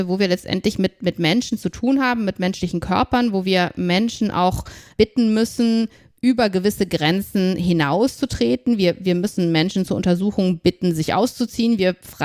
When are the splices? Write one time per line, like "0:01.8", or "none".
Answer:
none